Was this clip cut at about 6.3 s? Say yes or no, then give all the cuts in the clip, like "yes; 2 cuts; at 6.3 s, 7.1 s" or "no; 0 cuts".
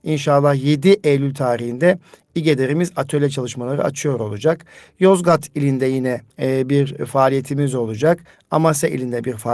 yes; 1 cut; at 6.3 s